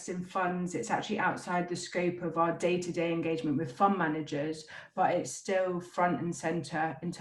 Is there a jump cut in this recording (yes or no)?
no